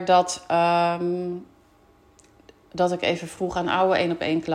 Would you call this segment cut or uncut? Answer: uncut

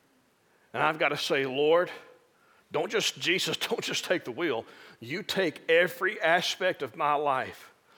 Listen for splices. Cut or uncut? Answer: uncut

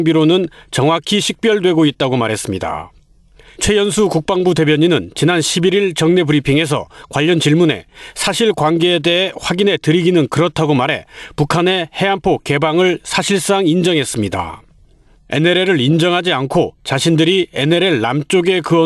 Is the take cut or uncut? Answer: uncut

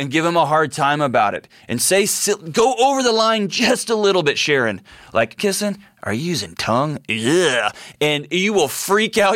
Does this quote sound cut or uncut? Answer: cut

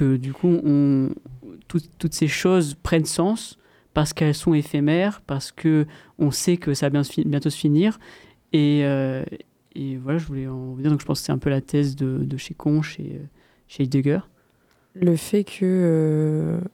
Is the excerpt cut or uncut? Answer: uncut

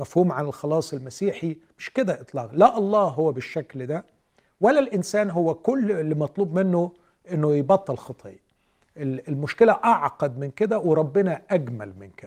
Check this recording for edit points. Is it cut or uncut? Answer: uncut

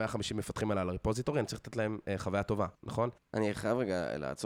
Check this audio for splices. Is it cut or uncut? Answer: cut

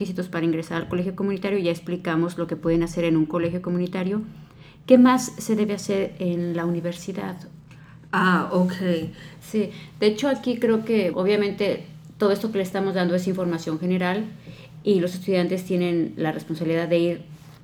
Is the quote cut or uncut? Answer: cut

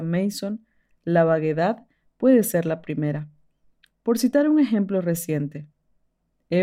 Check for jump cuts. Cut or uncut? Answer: uncut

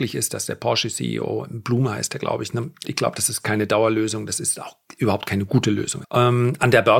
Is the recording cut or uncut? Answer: cut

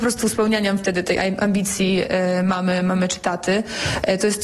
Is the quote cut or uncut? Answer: uncut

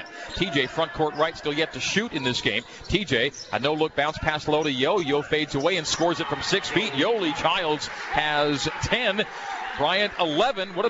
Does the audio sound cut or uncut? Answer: uncut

